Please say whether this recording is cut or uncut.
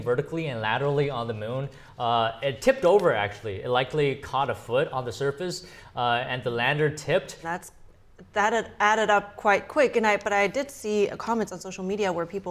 cut